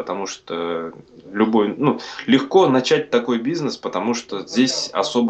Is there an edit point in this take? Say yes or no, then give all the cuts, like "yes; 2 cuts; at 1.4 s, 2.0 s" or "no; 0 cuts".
no; 0 cuts